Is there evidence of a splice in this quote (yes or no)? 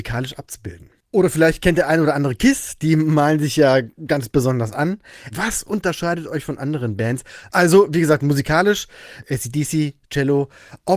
yes